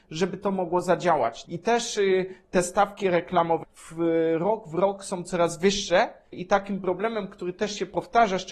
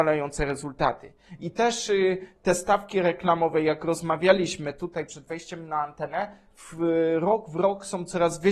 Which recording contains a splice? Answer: first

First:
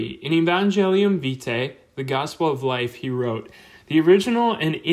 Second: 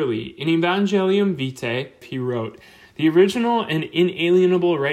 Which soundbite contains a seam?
second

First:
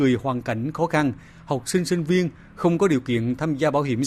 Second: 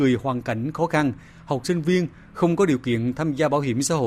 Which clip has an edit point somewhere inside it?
second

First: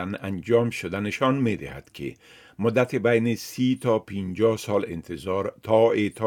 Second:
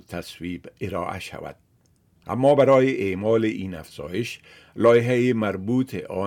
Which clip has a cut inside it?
second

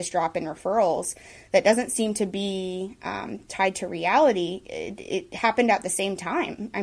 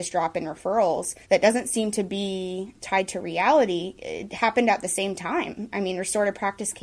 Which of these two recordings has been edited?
second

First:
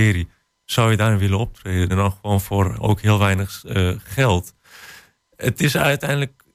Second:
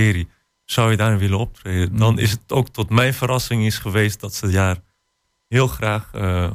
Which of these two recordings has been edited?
first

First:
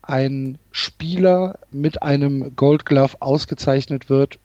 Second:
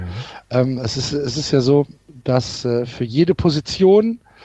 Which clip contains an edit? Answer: first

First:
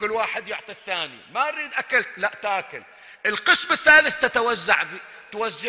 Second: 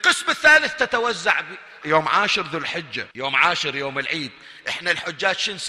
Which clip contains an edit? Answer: second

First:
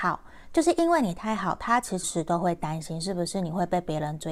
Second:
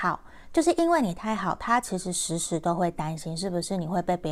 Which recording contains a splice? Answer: first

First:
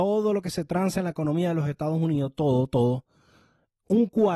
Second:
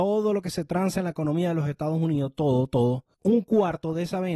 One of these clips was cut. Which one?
second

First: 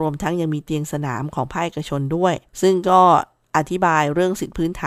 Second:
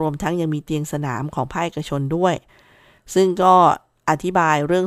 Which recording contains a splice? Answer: first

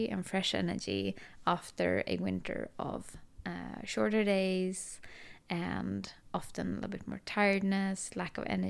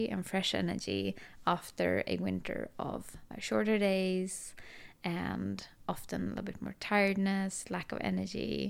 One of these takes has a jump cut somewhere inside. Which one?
second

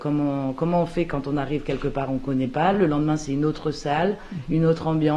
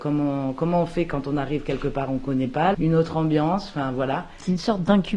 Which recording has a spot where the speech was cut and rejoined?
second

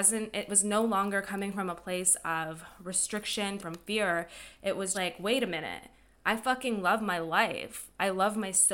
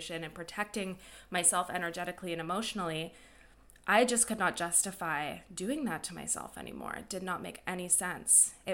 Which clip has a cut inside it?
first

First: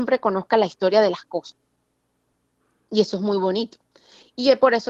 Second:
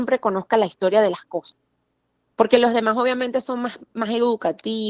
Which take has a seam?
second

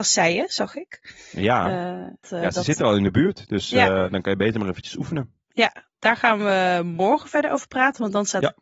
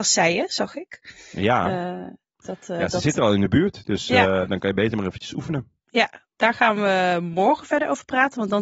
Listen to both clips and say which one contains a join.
first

